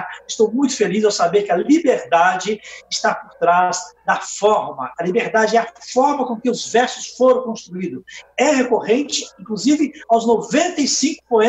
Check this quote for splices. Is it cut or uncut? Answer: uncut